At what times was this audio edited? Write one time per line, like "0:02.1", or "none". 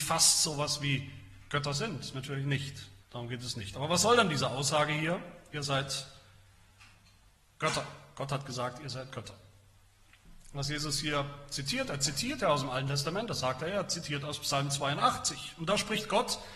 0:03.0